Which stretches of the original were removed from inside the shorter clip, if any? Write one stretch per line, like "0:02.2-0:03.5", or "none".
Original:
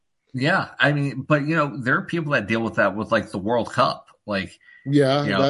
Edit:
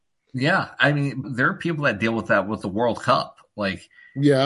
0:01.2-0:01.7
0:03.1-0:03.3

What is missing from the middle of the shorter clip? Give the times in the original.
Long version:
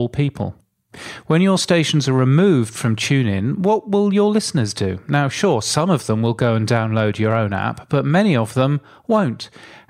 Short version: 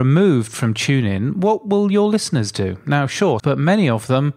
0:05.6-0:07.9

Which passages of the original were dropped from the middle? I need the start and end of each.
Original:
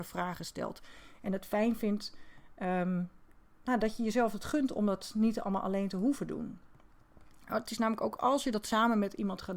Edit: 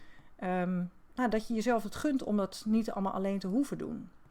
0:03.3-0:03.6

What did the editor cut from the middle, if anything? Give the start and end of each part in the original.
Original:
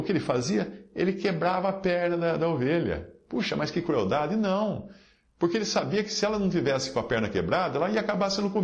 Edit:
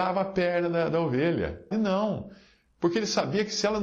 0:03.2-0:04.3

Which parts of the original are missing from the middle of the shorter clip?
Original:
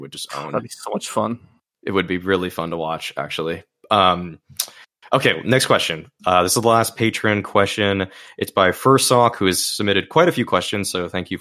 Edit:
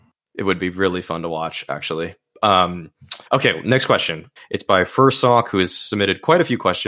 0:04.7-0:05.1
0:06.2-0:08.2

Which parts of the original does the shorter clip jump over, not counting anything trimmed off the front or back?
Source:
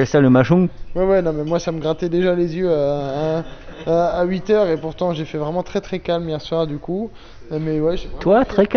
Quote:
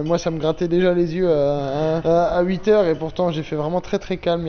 0:03.4-0:03.8

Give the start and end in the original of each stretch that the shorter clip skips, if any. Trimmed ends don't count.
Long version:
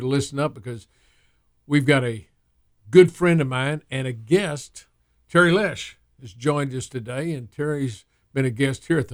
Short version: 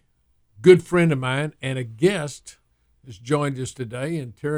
0:05.2-0:06.1

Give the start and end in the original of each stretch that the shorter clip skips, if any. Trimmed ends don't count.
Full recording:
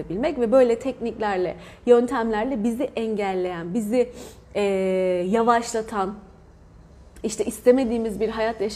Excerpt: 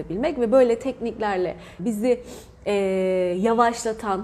0:01.8-0:03.7

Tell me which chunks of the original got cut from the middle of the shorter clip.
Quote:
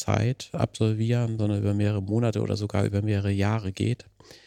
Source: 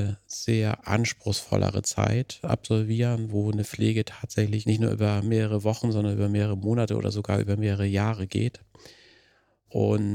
0:03.3-0:05.9

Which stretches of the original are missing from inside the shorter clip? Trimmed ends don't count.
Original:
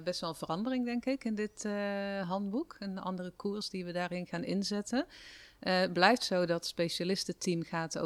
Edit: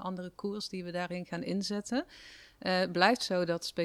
none

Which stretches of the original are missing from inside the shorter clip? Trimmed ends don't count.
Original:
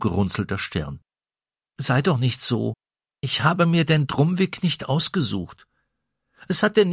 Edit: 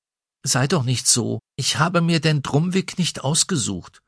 0:02.8-0:03.1

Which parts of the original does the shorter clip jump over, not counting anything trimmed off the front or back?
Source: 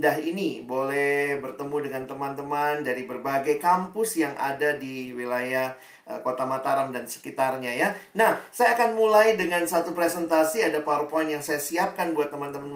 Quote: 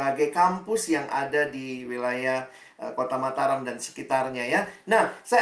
none

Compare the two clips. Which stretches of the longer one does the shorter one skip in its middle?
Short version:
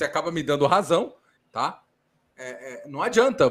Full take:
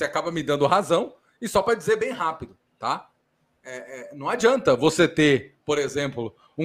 0:01.4-0:02.6

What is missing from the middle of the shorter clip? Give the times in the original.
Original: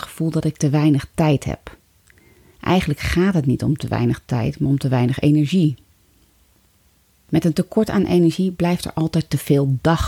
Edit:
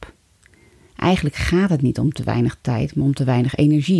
none

